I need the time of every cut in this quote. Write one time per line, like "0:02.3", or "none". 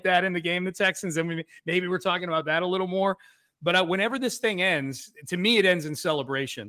none

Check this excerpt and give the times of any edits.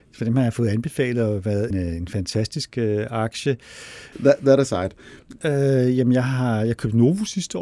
0:01.7
0:04.1
0:05.4

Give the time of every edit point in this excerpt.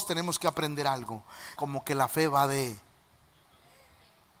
0:01.6

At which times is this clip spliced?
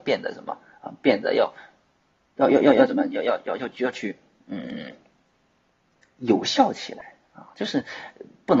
none

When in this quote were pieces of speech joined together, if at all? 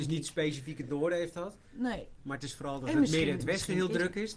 none

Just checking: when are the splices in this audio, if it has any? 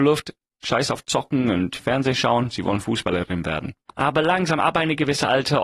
0:03.9

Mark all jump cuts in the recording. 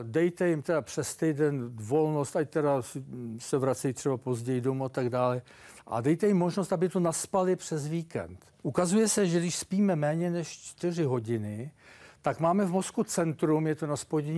0:08.6

